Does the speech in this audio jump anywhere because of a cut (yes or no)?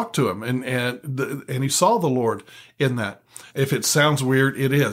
yes